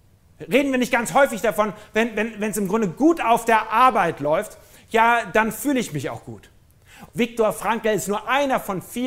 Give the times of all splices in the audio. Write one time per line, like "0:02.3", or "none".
0:07.1